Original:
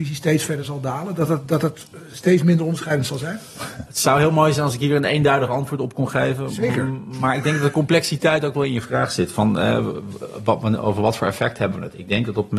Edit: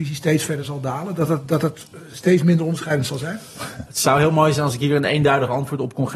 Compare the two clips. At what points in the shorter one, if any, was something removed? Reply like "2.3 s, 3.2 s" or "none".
none